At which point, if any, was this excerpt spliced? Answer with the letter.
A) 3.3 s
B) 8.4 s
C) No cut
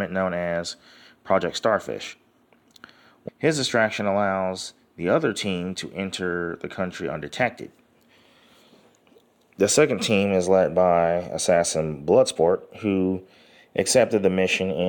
A